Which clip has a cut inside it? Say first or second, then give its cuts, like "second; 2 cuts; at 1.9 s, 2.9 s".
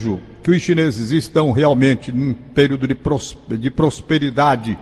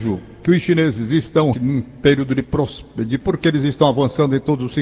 second; 2 cuts; at 1.5 s, 3.2 s